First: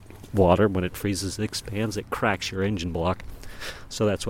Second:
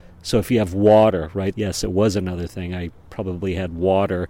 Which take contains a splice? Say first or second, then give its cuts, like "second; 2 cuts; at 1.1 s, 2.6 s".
second; 1 cut; at 1.5 s